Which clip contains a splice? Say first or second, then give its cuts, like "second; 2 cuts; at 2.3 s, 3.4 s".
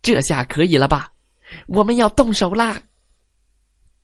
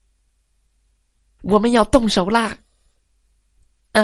second; 1 cut; at 1.4 s